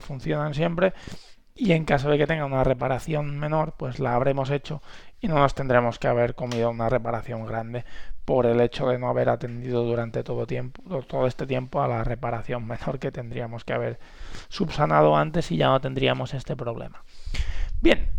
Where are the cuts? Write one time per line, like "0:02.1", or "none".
none